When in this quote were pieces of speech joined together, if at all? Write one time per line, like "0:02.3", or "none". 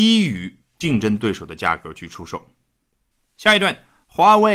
none